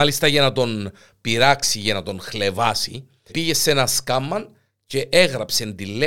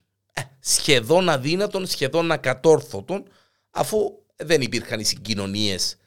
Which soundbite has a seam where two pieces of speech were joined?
first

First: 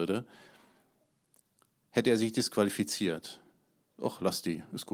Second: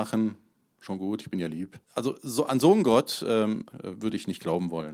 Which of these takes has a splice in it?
second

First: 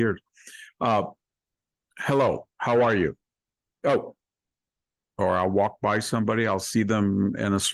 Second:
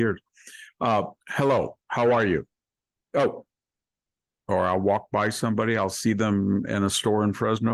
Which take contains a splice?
second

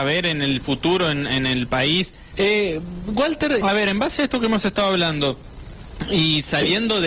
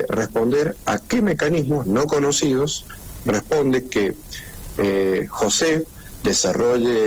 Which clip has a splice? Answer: first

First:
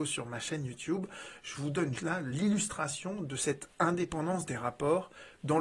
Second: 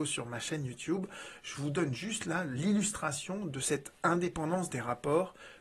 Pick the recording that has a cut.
first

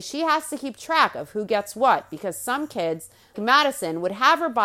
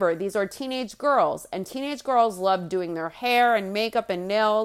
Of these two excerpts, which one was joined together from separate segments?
first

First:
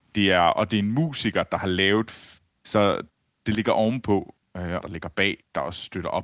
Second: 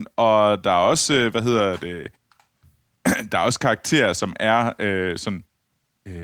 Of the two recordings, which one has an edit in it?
first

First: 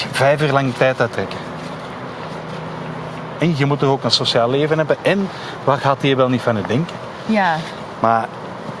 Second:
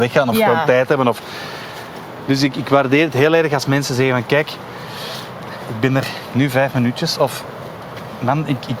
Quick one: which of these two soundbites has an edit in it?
first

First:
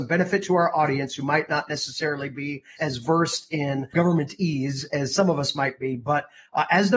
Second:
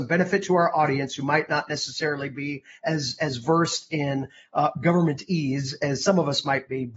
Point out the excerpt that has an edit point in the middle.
first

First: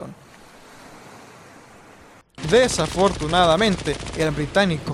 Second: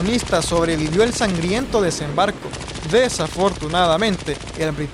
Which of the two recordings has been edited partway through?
first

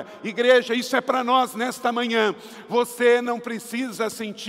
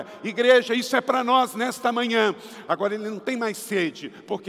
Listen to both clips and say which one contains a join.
second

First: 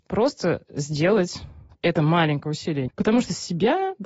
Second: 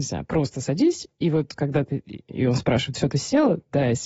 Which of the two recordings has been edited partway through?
first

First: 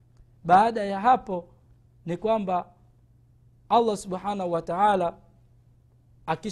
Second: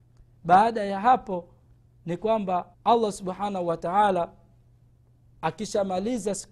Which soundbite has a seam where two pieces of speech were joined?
second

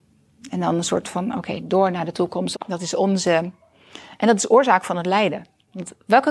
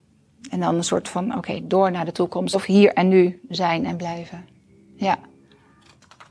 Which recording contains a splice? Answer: first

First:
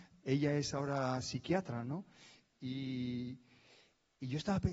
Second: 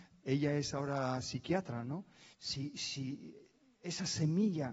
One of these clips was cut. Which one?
second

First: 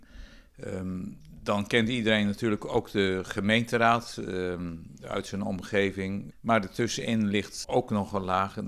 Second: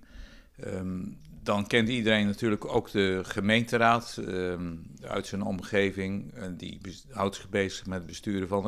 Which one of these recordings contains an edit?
first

